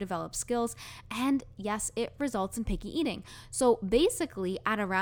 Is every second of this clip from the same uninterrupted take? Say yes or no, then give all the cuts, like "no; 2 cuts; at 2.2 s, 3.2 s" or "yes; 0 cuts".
yes; 0 cuts